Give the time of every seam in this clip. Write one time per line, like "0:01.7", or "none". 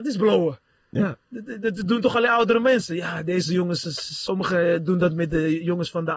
none